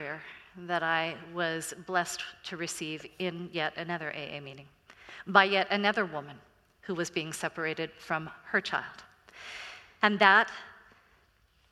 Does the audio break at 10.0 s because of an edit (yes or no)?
yes